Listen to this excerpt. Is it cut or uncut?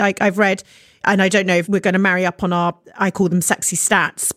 uncut